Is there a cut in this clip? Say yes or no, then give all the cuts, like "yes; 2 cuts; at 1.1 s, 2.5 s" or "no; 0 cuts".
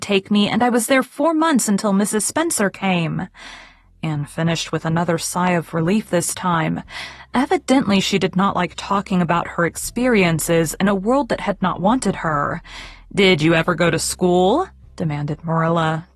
no; 0 cuts